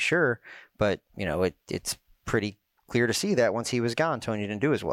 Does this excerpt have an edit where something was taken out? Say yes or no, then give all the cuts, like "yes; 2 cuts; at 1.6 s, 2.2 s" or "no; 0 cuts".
yes; 1 cut; at 1.1 s